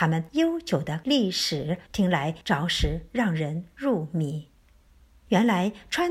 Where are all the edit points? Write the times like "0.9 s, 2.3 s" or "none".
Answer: 1.9 s